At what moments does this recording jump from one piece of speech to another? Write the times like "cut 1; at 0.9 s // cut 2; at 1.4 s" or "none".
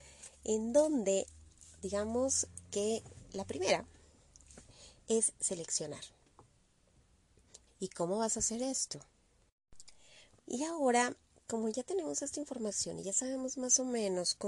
cut 1; at 7.7 s // cut 2; at 10.4 s